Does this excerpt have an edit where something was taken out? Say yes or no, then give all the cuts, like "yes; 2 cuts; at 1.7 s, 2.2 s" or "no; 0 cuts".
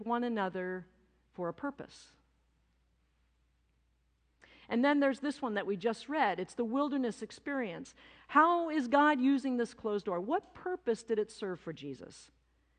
no; 0 cuts